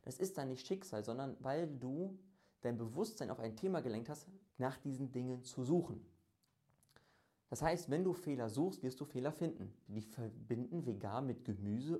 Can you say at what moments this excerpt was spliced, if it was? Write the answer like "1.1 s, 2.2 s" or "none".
4.5 s, 9.9 s

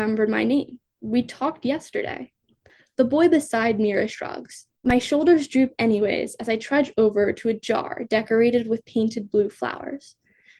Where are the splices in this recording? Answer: 4.8 s

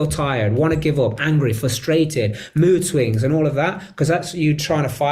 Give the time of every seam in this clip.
none

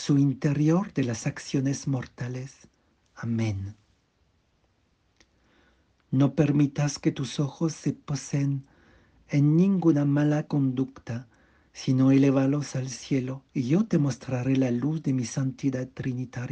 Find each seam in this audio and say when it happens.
none

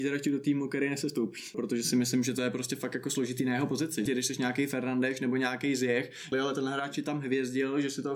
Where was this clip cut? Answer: 1.5 s, 4.1 s, 6.3 s

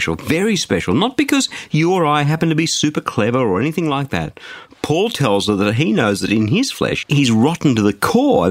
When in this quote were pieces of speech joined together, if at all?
7.0 s

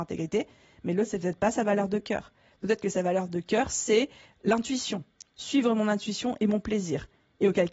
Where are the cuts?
none

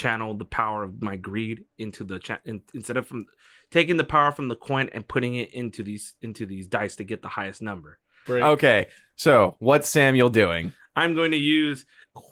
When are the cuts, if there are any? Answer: 8.3 s

